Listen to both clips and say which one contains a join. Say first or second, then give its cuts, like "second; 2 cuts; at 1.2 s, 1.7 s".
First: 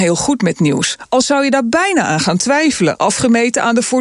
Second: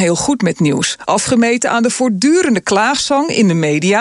second; 1 cut; at 1.1 s